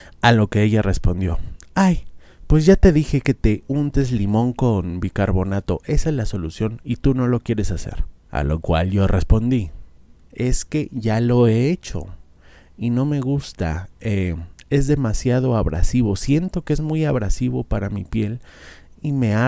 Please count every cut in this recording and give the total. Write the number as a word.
one